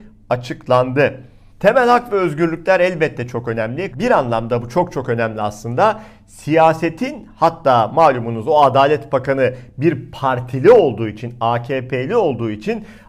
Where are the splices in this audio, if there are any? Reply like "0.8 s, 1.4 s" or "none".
1.5 s, 3.9 s

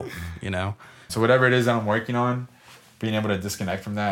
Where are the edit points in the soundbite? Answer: 1.1 s

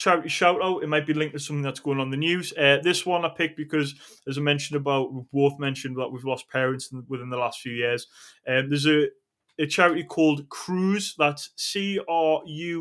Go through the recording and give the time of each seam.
none

